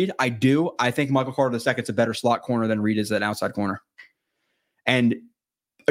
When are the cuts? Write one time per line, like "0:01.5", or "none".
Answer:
none

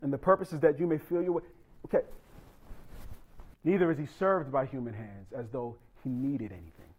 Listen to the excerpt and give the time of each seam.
0:03.5

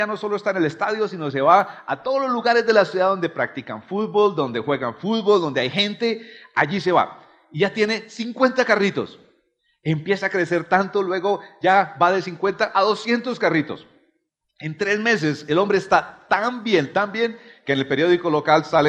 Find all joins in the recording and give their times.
none

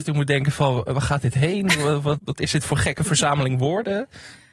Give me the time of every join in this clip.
0:02.2

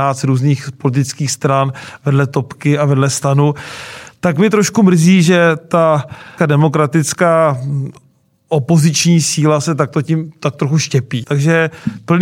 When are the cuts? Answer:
0:06.4
0:11.2

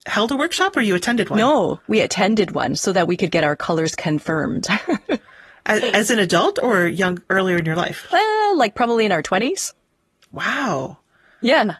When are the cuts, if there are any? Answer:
none

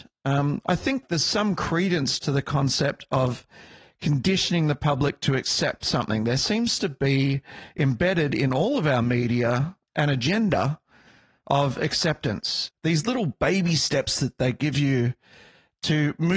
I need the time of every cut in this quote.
0:12.7

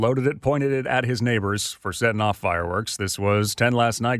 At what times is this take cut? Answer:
none

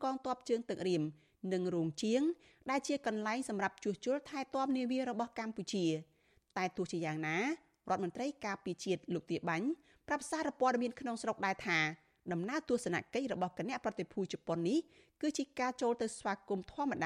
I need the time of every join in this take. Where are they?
none

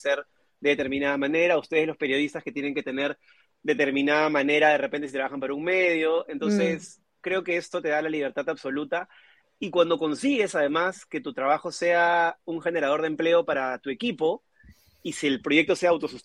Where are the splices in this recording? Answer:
none

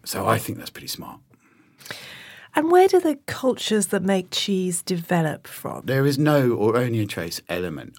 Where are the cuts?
0:05.8

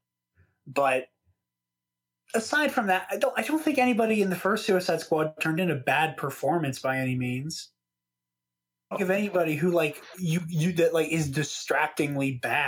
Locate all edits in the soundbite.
0:08.9

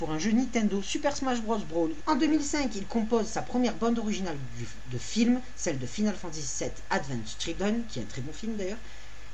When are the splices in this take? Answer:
0:02.0

